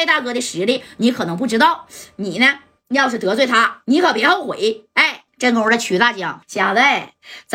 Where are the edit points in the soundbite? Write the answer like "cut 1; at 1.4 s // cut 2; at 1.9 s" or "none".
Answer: cut 1; at 5.3 s // cut 2; at 6.4 s